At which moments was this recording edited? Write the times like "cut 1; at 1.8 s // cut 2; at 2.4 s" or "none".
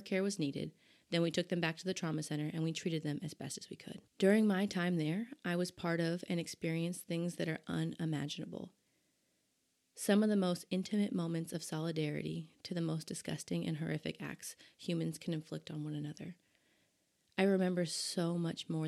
cut 1; at 4.1 s

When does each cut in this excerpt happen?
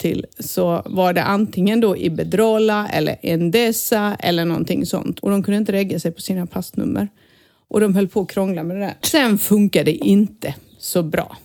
cut 1; at 5.2 s // cut 2; at 9.0 s

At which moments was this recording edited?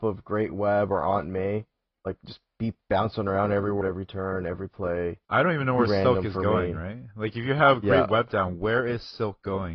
cut 1; at 3.8 s // cut 2; at 5.2 s

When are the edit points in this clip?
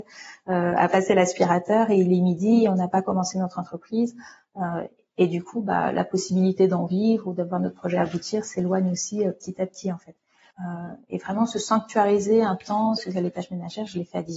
cut 1; at 10.5 s // cut 2; at 13.0 s

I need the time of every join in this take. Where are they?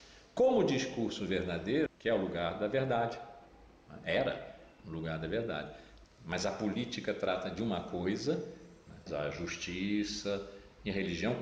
cut 1; at 1.9 s // cut 2; at 6.0 s // cut 3; at 9.1 s

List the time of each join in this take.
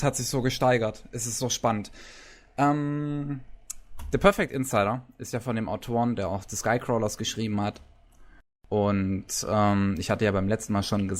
none

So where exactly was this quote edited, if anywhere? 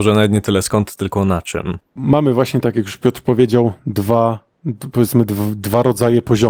none

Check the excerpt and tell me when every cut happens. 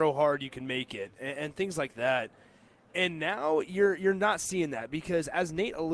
none

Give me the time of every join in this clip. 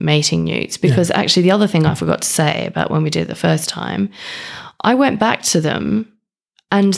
none

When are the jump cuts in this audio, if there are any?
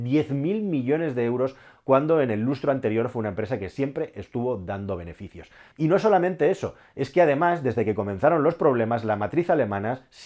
cut 1; at 5.7 s

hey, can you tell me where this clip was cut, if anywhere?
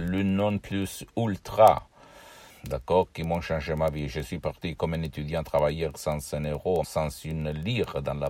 cut 1; at 2.5 s // cut 2; at 6.8 s

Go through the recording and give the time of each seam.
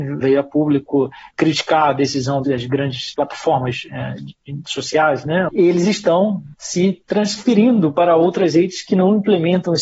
cut 1; at 5.5 s // cut 2; at 6.5 s

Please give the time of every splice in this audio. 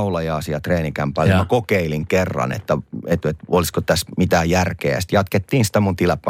none

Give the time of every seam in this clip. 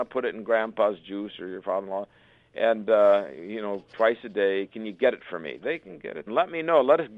cut 1; at 6.3 s

